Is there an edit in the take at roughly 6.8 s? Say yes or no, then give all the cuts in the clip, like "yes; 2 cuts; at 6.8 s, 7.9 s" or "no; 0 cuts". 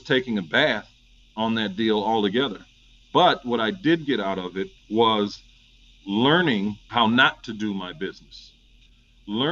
yes; 2 cuts; at 4.8 s, 6.8 s